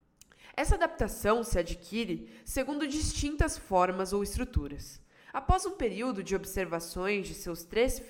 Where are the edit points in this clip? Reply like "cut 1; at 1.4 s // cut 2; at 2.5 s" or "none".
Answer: cut 1; at 5.3 s